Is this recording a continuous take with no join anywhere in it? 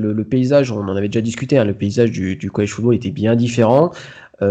yes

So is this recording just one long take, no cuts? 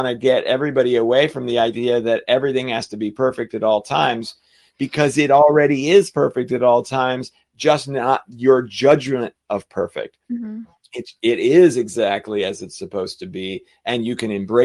yes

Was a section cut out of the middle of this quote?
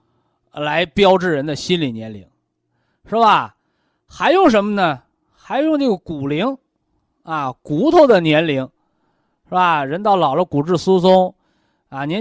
no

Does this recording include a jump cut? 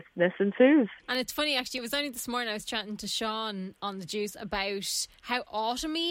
yes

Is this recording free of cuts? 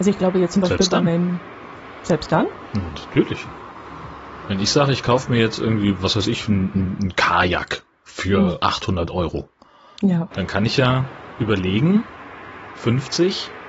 no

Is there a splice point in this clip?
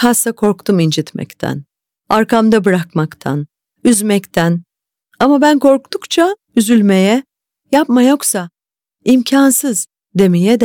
no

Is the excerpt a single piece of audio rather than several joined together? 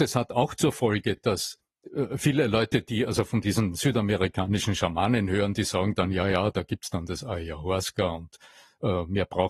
yes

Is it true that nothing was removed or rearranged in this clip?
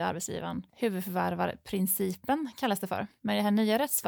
yes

